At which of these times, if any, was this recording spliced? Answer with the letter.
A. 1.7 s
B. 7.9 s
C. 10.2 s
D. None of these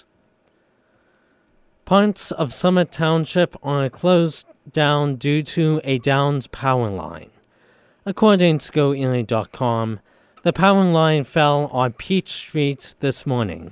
D